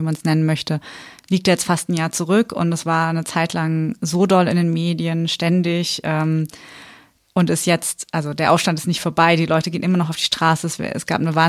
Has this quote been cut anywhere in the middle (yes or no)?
no